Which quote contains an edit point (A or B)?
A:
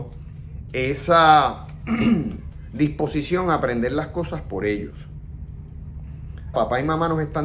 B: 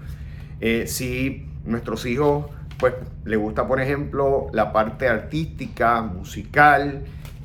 A